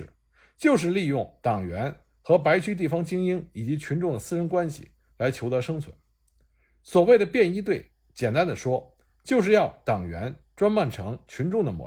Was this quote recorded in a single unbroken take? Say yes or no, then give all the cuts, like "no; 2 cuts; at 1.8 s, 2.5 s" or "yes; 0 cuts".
yes; 0 cuts